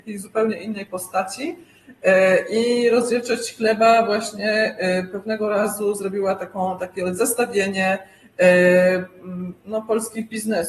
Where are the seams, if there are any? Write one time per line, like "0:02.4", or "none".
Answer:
0:09.6